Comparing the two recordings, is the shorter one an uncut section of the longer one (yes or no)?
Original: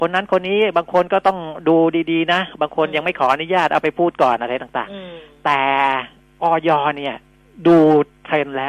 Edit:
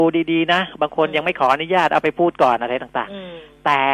yes